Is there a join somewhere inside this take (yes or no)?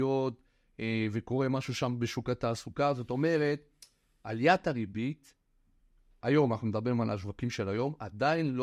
no